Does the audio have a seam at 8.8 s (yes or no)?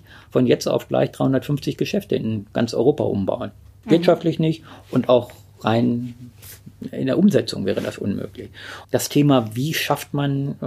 yes